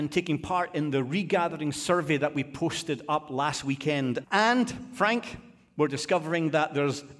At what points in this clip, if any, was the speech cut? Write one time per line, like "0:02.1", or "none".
0:04.2